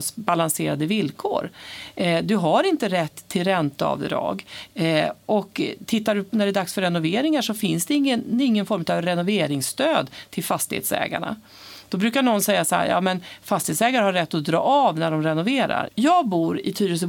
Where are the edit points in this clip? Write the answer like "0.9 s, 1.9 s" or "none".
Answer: 15.9 s